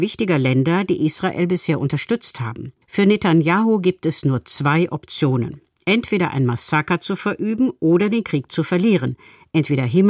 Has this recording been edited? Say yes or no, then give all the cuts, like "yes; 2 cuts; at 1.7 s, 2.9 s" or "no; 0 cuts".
yes; 1 cut; at 2.8 s